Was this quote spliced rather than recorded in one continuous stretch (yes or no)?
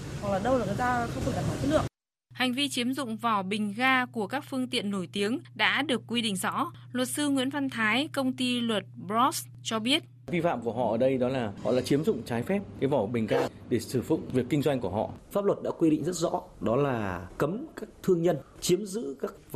no